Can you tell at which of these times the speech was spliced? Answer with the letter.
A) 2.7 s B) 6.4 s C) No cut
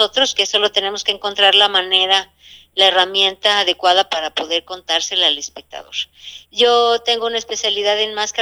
B